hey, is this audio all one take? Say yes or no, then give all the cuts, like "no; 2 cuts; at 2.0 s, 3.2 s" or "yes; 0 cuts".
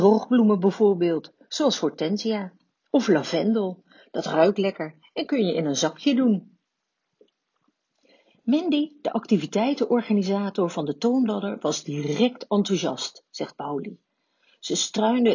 yes; 0 cuts